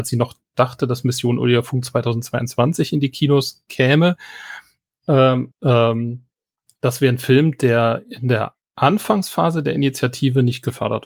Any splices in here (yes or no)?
yes